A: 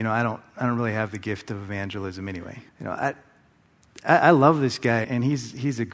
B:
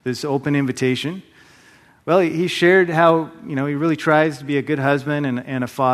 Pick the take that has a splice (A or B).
A